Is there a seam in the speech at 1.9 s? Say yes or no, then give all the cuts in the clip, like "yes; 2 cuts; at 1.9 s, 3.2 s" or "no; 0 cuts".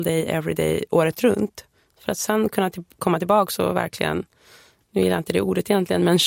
yes; 1 cut; at 1.9 s